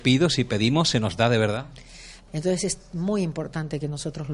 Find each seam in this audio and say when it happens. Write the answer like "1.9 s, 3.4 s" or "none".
2.3 s